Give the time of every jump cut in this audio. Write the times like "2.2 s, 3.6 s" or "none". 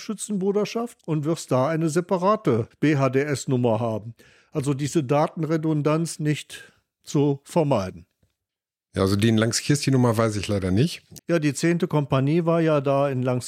6.2 s, 11.2 s

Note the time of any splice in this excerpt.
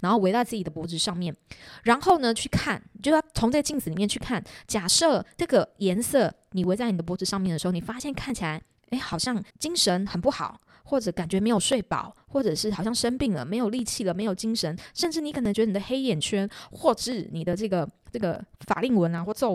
9.5 s

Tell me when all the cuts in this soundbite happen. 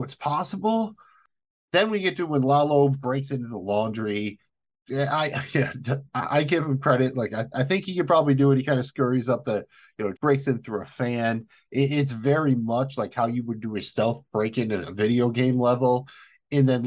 10.1 s

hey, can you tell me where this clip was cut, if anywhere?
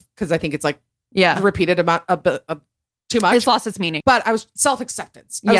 1.1 s, 4.0 s

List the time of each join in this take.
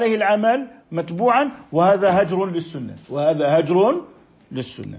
3.0 s

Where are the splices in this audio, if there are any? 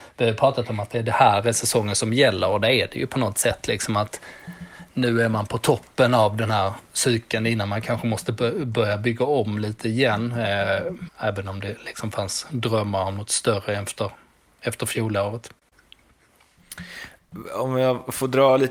11.1 s

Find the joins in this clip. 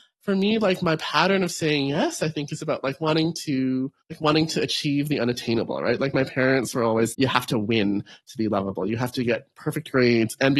4.0 s, 7.1 s

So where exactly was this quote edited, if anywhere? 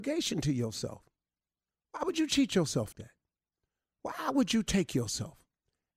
2.9 s

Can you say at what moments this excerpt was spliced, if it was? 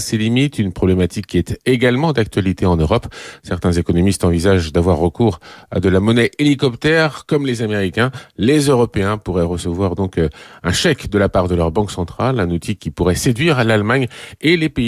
none

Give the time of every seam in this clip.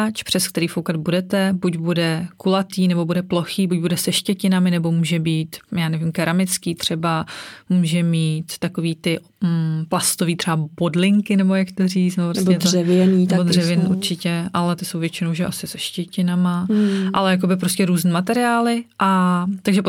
none

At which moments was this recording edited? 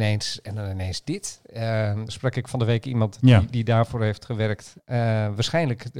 2.1 s, 4.8 s

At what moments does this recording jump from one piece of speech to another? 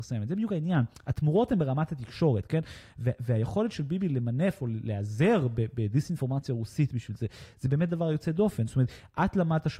none

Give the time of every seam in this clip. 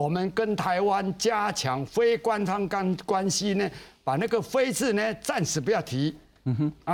none

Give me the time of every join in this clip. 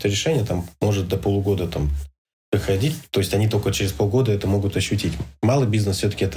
none

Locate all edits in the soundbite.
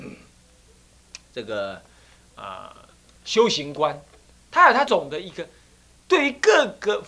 4.9 s

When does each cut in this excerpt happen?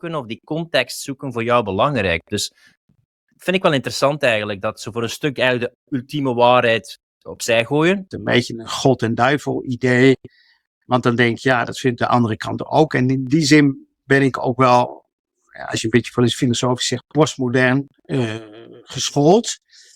8.1 s

